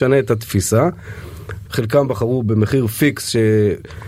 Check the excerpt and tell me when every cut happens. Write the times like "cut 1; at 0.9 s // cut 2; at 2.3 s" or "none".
cut 1; at 1.7 s